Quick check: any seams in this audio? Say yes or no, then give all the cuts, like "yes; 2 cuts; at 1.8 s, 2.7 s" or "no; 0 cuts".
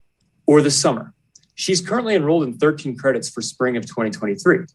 no; 0 cuts